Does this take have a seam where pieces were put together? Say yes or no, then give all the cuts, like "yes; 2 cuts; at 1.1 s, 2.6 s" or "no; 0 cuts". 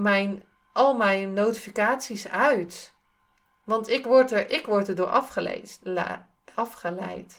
no; 0 cuts